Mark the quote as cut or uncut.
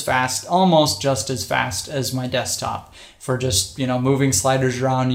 uncut